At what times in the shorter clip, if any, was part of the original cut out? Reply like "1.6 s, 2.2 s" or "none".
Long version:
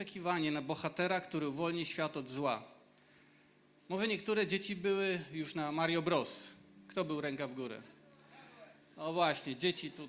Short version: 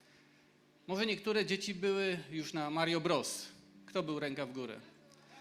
none

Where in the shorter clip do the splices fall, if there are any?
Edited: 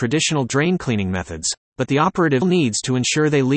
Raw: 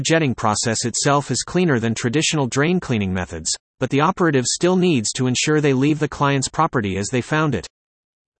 2.4 s

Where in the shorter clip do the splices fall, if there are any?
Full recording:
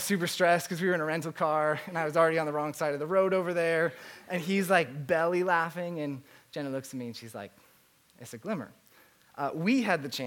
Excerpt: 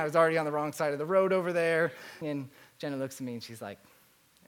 2.2 s

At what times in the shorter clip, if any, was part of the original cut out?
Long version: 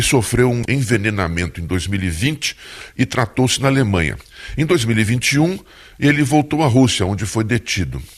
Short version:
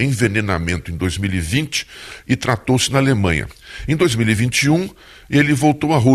none

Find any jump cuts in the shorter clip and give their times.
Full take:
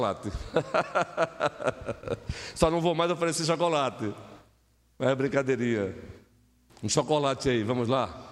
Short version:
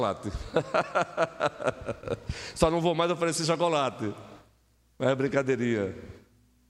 none

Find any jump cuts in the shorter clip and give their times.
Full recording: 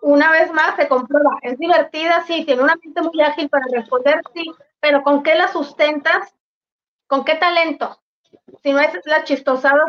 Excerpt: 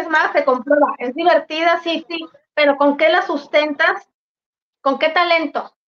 2.0 s

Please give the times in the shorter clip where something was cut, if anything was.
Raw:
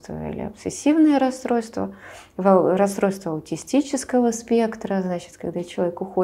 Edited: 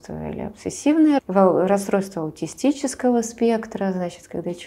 1.2 s

